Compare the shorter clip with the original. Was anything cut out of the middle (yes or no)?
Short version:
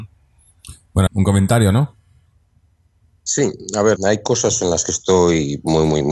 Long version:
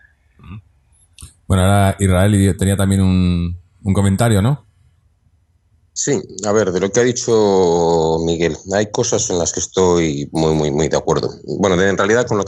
yes